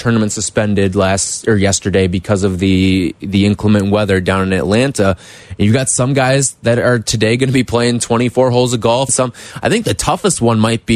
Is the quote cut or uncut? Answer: cut